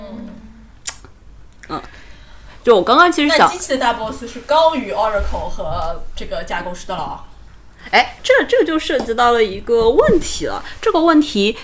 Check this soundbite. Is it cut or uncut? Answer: cut